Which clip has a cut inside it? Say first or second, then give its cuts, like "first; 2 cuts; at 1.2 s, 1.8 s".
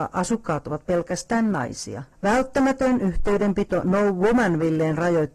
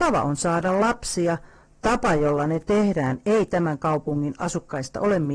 first; 1 cut; at 2.1 s